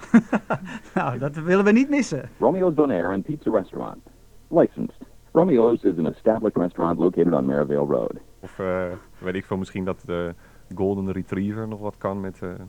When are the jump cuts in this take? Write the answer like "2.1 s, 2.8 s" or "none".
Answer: 5.2 s, 8.4 s